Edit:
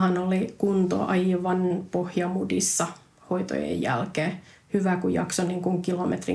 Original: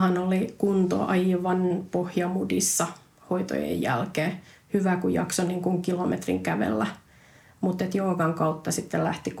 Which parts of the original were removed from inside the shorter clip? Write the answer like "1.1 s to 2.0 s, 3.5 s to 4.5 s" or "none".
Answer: none